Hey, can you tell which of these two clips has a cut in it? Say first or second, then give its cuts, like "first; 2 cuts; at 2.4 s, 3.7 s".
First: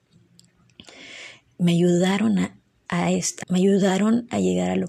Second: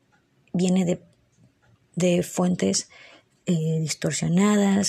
first; 1 cut; at 3.4 s